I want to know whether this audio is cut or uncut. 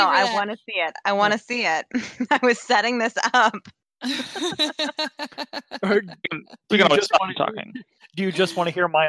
uncut